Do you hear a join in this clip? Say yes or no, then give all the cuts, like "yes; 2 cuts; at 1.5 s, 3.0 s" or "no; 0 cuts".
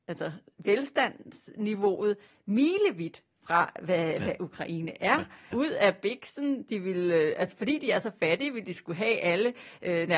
yes; 1 cut; at 5.5 s